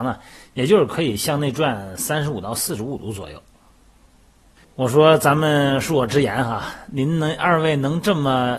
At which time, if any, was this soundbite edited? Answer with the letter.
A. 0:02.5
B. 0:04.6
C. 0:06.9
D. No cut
B